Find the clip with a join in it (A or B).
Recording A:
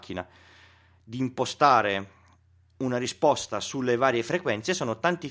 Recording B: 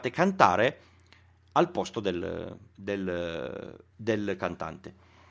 B